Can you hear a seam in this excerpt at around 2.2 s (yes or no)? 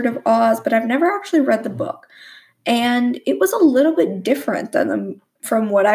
no